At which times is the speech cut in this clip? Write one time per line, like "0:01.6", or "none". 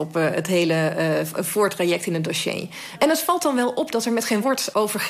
none

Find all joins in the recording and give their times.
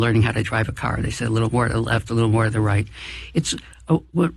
none

